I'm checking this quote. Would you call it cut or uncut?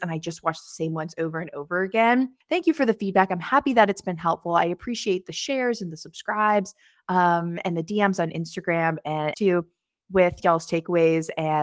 cut